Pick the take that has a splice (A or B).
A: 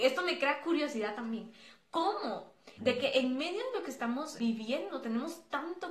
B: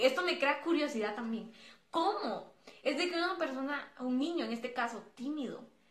A